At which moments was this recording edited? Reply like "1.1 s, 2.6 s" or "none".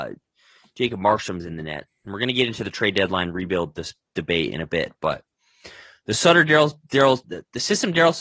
1.9 s, 7.2 s

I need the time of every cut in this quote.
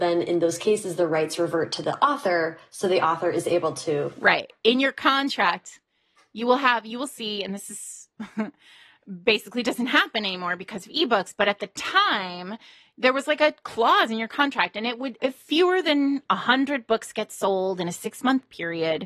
15.2 s

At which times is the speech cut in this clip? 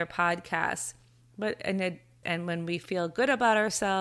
2.2 s

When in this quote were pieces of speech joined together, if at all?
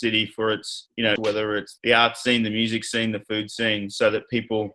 1.2 s

